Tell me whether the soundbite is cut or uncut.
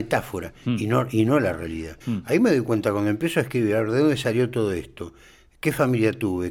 cut